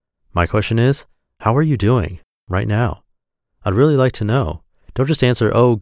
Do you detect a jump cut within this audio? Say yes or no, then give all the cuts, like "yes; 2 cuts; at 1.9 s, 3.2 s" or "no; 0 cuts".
no; 0 cuts